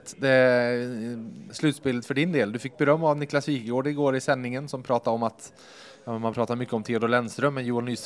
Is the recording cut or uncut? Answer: cut